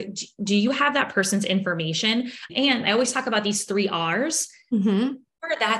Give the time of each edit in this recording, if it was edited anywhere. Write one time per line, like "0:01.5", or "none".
0:02.5